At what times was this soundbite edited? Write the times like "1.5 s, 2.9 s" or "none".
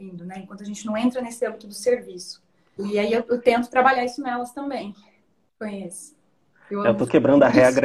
2.8 s, 5.5 s